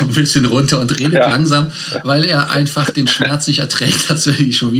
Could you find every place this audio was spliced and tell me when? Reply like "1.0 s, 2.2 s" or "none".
none